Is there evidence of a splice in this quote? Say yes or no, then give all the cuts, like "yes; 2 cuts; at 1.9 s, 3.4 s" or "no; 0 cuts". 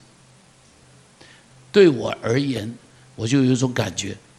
yes; 1 cut; at 3.1 s